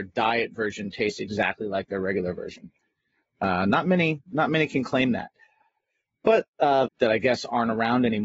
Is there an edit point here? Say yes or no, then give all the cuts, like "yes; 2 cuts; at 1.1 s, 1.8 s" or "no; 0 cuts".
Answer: yes; 1 cut; at 6.9 s